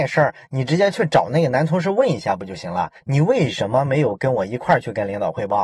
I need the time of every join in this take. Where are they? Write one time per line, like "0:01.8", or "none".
none